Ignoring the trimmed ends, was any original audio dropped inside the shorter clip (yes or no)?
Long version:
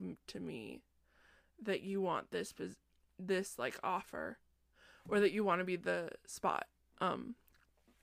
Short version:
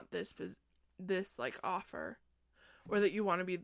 no